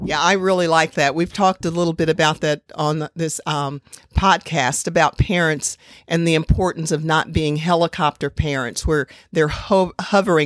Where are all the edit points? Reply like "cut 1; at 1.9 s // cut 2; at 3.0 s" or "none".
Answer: none